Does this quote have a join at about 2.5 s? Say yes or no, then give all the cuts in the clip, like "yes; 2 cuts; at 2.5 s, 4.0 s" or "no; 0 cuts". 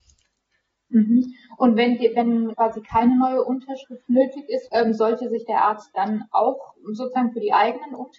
yes; 2 cuts; at 2.5 s, 4.7 s